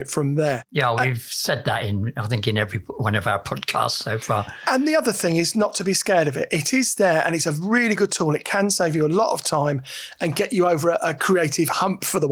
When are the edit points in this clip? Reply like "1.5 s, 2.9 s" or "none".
none